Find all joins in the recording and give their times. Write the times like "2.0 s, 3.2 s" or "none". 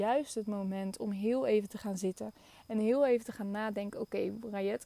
none